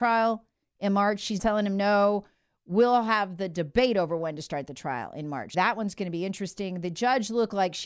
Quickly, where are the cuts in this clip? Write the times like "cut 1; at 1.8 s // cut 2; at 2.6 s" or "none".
cut 1; at 1.4 s // cut 2; at 5.5 s